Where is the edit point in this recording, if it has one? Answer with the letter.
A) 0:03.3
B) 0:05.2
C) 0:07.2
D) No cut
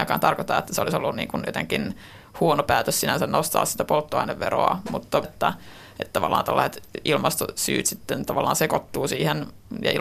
B